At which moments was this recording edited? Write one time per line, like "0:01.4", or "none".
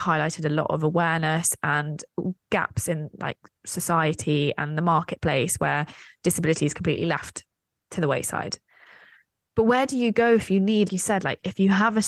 0:10.9